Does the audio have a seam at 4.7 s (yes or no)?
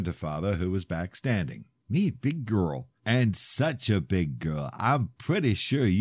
no